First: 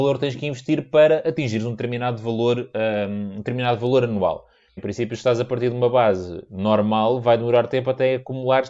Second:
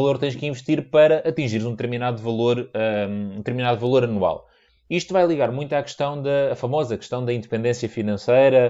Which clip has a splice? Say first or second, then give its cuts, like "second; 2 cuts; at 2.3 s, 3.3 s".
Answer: first; 1 cut; at 4.8 s